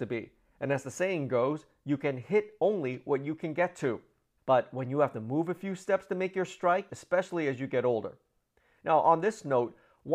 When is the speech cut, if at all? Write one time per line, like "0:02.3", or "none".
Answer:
0:04.4
0:06.9